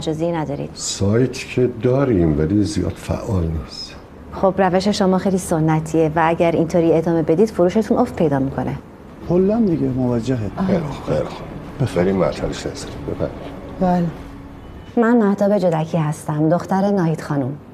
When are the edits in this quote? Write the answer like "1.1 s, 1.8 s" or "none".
9.2 s